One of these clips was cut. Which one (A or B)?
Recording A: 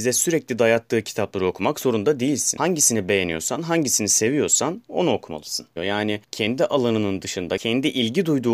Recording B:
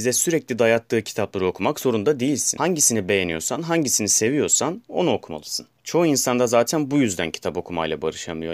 A